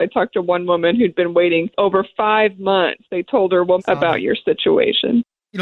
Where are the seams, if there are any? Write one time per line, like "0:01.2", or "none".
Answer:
0:03.8